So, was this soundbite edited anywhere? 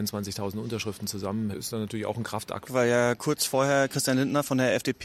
yes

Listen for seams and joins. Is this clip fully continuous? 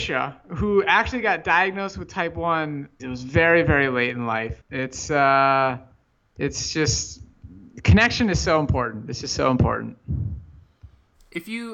no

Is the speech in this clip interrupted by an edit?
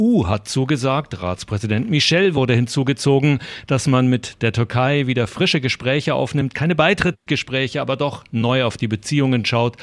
no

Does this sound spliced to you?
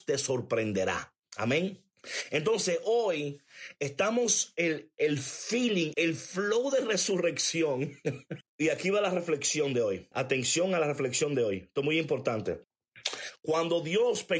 yes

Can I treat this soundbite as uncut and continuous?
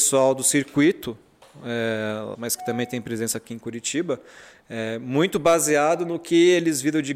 no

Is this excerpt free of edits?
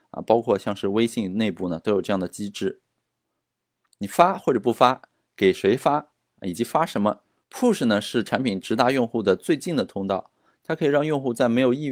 no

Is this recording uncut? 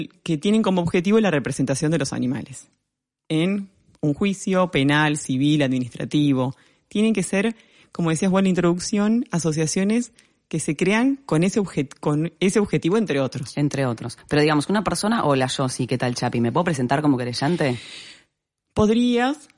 yes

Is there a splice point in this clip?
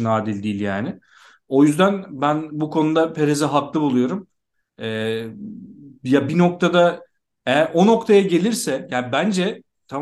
no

